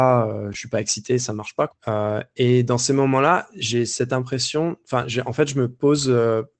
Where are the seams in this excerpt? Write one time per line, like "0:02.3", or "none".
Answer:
0:01.7